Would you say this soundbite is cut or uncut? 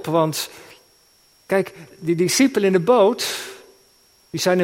uncut